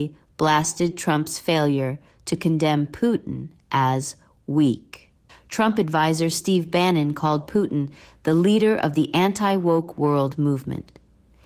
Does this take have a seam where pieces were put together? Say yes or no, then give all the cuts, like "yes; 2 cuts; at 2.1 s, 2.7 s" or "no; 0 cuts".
yes; 1 cut; at 5.3 s